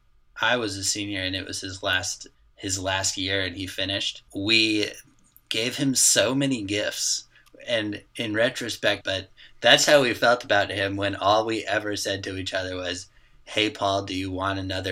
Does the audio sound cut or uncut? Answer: cut